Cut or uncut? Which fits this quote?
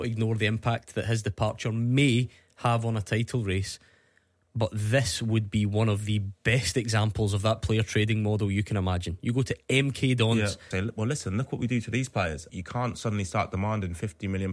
cut